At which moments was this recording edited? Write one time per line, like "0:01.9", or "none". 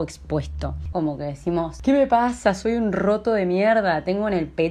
0:00.9